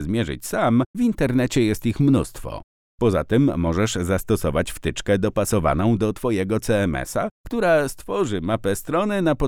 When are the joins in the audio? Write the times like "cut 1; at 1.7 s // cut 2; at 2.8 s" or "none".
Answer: cut 1; at 0.9 s